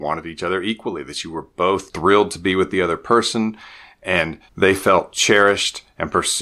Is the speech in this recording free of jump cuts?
no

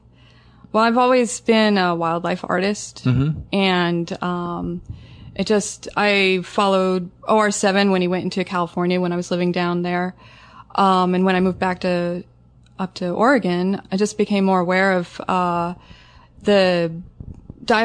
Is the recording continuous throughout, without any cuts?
no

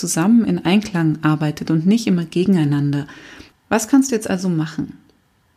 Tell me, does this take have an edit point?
yes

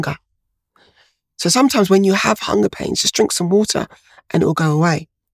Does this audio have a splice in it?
no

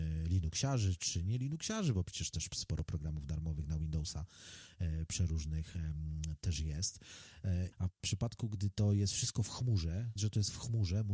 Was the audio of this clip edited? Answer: yes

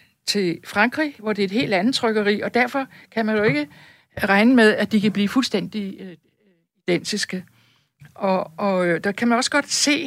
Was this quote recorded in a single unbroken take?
yes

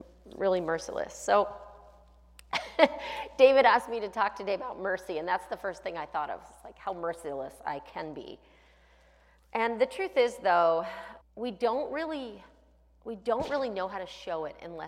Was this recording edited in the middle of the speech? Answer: yes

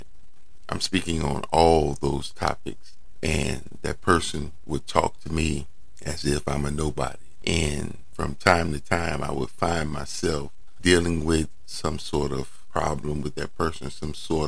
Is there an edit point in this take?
yes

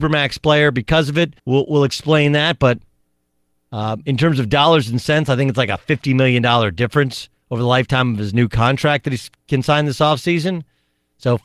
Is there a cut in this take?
yes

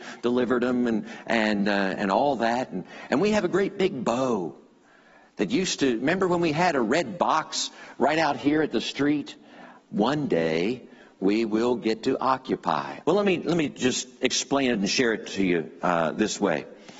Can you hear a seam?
yes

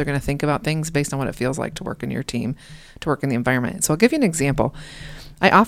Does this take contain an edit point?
no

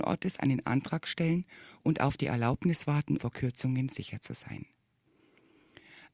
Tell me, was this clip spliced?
yes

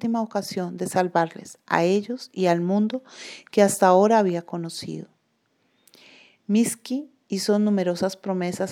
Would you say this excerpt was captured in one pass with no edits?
yes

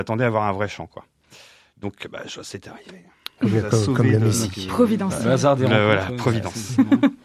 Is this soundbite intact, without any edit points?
yes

